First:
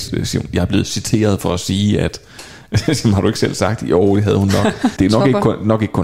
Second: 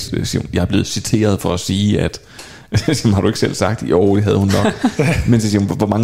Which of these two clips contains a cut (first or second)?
first